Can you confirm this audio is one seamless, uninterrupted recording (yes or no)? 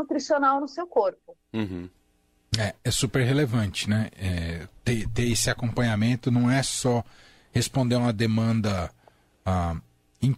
yes